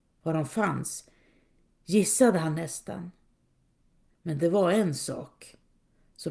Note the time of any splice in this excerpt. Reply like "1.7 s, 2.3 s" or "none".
none